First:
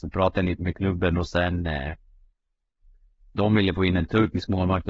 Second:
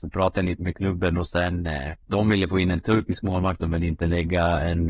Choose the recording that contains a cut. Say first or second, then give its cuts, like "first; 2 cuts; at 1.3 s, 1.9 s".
second; 1 cut; at 2.0 s